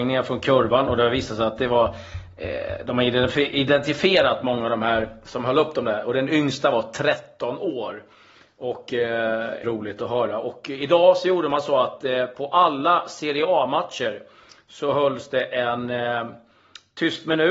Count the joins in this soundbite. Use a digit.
1